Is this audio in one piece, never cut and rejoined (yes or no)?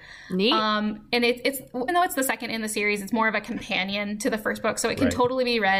no